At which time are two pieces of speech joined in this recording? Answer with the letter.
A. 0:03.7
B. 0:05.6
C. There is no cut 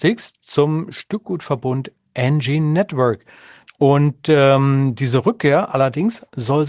A